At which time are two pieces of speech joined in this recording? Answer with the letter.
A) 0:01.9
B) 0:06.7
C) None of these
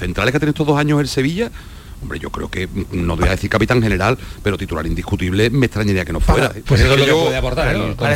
B